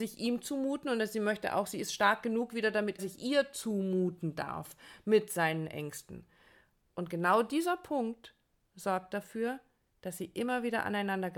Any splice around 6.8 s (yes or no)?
no